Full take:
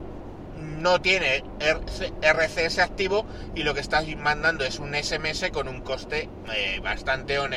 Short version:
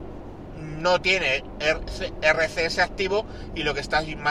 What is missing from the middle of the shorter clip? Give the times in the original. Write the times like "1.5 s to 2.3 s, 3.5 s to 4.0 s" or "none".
none